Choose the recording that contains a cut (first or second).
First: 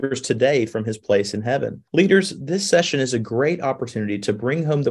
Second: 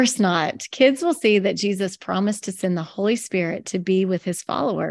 first